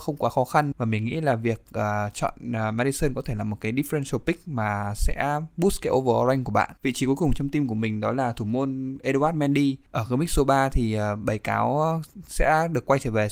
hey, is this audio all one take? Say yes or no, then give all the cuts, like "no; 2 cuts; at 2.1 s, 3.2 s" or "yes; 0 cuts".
no; 2 cuts; at 6.8 s, 9.9 s